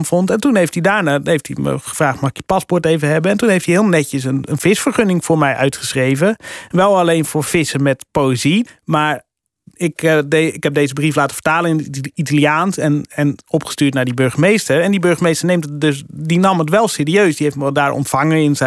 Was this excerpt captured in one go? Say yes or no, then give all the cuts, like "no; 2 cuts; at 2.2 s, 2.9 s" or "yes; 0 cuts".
no; 1 cut; at 8.7 s